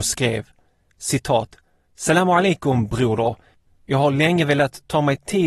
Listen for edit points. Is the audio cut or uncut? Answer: cut